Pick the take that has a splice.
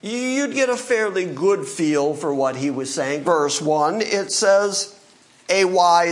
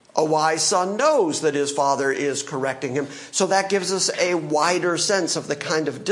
first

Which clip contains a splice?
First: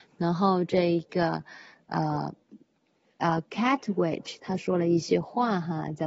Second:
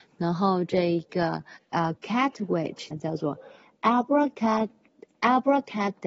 second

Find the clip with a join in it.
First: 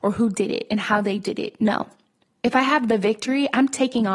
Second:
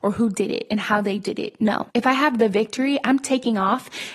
second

